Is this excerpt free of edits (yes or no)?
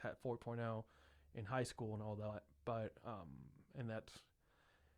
yes